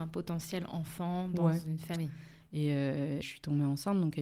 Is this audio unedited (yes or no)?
no